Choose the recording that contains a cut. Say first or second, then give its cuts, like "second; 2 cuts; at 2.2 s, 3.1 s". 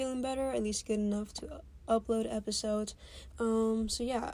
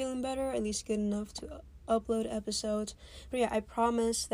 first; 1 cut; at 3.3 s